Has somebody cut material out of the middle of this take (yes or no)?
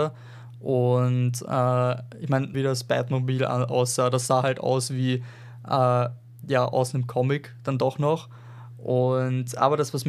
yes